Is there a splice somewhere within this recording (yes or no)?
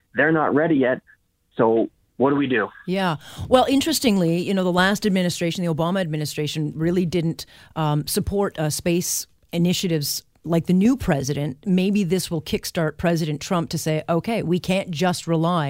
no